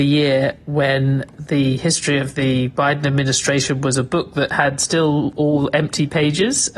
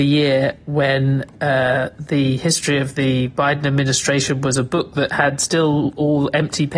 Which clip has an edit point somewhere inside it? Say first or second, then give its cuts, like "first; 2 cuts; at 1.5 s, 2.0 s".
first; 1 cut; at 1.3 s